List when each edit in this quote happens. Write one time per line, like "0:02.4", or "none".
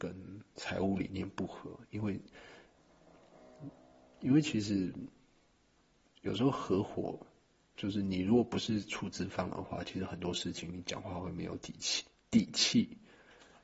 none